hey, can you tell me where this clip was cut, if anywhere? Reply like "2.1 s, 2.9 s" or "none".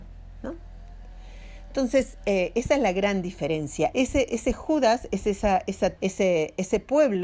3.9 s, 6.0 s